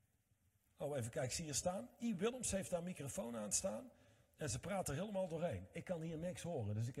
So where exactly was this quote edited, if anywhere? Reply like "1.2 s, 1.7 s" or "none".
none